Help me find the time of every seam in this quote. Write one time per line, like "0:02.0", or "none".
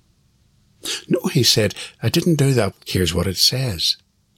0:02.7